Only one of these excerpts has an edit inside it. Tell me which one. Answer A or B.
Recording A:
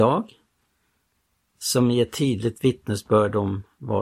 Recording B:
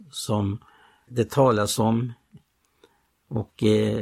B